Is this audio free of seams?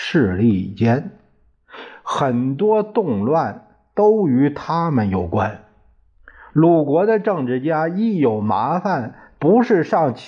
yes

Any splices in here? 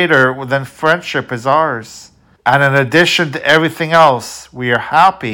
yes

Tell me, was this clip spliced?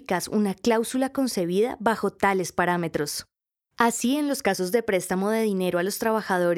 no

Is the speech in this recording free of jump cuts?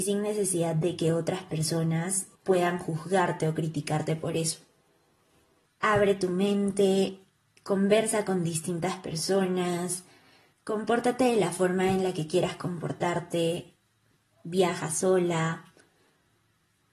no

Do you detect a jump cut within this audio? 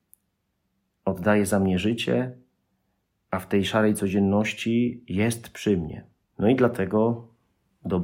yes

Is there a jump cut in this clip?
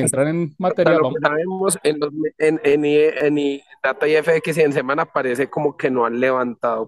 no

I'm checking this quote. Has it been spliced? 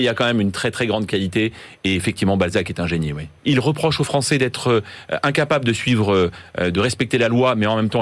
yes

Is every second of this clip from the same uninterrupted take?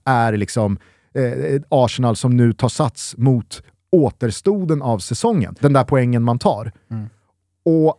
no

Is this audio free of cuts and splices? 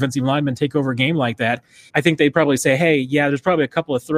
no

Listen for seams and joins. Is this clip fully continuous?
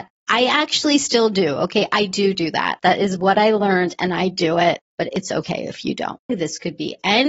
no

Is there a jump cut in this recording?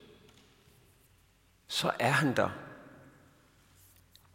no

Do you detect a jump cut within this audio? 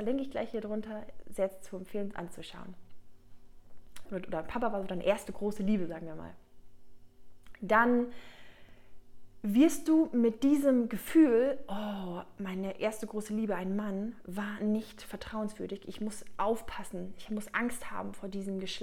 yes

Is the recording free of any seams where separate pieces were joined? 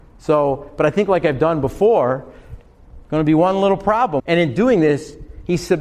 no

